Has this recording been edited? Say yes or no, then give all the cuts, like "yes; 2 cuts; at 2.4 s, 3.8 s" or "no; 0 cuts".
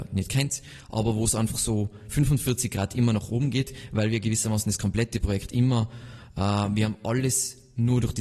no; 0 cuts